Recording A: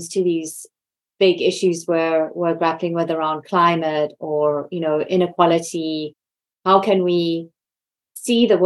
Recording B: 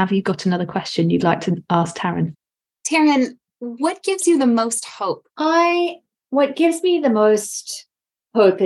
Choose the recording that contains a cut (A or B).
B